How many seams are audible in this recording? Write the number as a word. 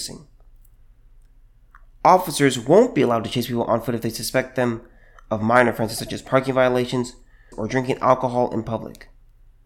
one